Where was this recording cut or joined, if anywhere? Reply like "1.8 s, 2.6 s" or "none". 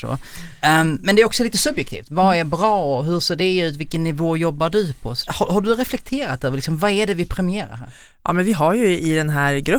5.3 s